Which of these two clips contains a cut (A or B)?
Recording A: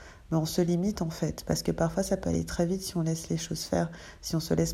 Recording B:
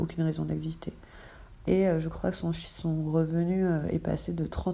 B